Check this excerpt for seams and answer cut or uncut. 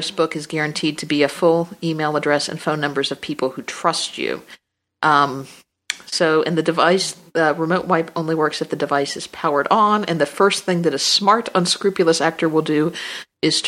uncut